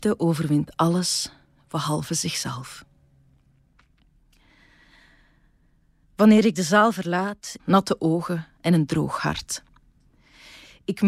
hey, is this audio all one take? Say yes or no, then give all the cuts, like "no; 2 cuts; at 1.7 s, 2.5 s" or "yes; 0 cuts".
no; 1 cut; at 7.6 s